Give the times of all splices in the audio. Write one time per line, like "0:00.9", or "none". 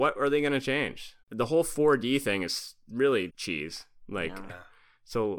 0:01.2
0:03.3
0:04.5